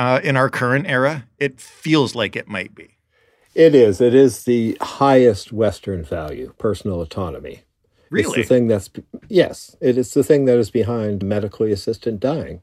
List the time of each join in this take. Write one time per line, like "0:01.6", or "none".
0:11.2

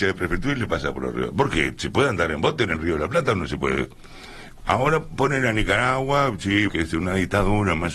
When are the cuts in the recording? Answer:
0:04.6
0:06.7

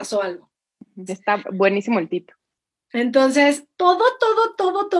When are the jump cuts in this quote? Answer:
0:01.1

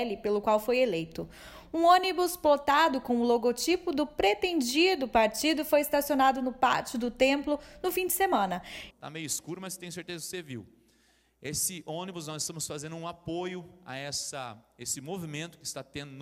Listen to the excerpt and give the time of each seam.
0:08.9

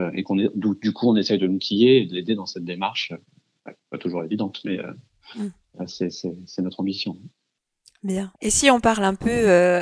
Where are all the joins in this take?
0:08.4

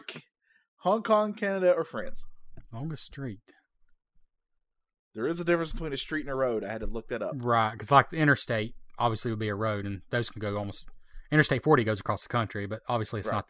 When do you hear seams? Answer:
none

